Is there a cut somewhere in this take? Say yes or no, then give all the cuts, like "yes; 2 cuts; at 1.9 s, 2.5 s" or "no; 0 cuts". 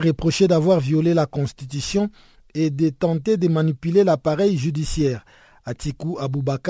no; 0 cuts